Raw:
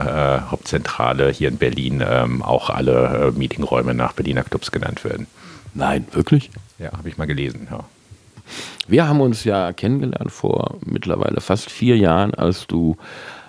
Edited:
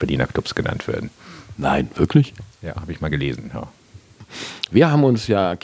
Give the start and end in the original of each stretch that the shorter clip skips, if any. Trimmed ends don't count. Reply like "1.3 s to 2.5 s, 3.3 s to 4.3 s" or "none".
none